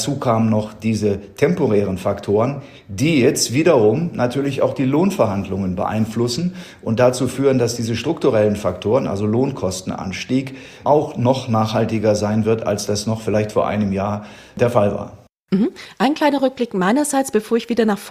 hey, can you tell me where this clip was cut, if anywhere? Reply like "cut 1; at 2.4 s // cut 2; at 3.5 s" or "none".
cut 1; at 10.8 s